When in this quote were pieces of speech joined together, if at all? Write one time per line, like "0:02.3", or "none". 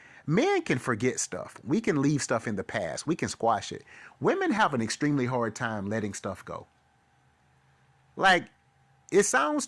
none

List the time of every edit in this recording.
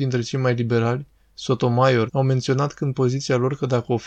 0:02.1

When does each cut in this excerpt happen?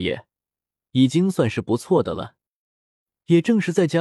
none

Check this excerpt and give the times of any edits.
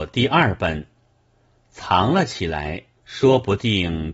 0:03.0

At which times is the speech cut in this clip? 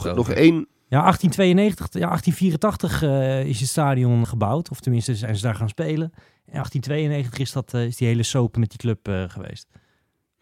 0:04.2

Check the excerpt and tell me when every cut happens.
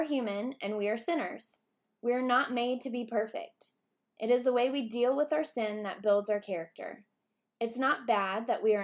none

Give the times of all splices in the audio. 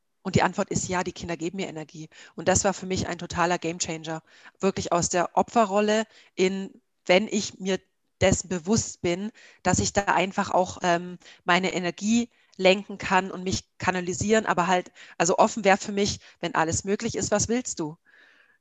none

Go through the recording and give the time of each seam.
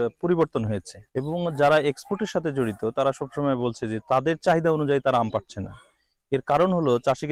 0:01.1

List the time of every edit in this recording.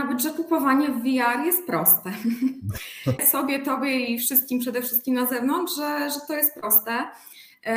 0:03.2

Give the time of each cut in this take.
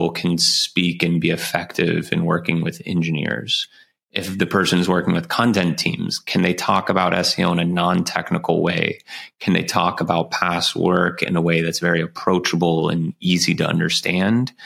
none

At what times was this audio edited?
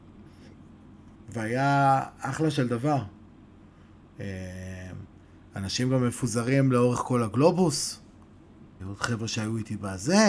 0:01.1
0:08.8

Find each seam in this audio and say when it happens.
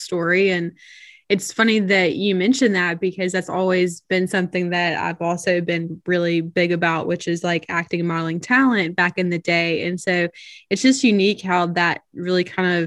none

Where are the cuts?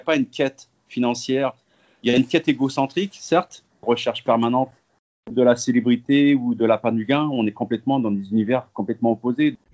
0:03.8

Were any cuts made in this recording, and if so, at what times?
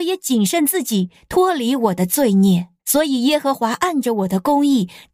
0:02.8

